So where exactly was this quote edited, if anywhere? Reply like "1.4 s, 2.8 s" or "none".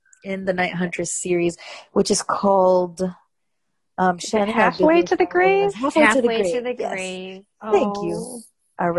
none